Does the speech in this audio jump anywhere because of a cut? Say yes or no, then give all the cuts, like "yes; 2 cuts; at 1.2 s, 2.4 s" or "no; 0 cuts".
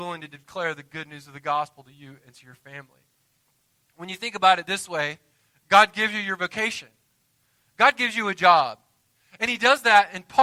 no; 0 cuts